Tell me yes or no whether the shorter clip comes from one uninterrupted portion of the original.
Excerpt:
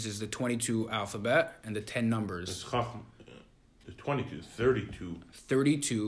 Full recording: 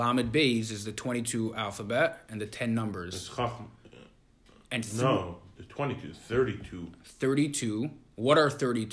no